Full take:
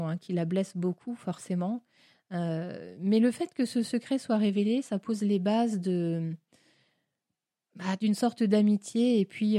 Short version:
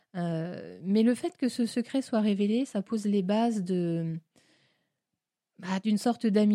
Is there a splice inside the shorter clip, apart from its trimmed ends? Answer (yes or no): no